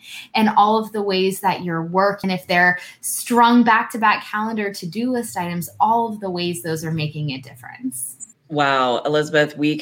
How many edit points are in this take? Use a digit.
1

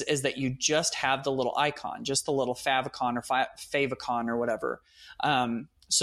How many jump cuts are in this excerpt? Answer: 0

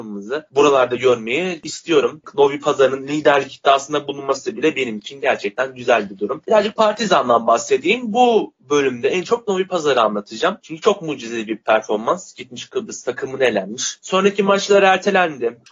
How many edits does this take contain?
2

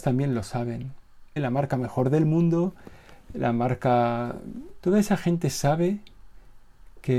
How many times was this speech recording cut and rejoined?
2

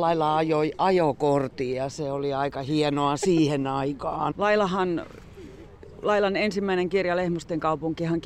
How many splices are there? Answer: 1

